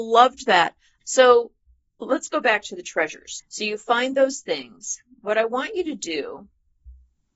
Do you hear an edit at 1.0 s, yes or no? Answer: yes